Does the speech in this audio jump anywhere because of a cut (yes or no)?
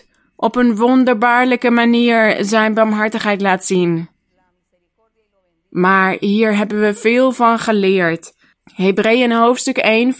yes